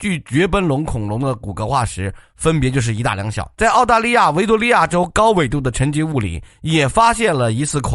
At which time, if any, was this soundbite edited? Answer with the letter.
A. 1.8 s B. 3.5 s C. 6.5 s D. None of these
B